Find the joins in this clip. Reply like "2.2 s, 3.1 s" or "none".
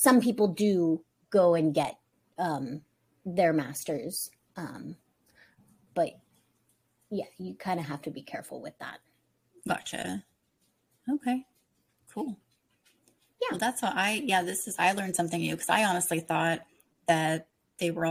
none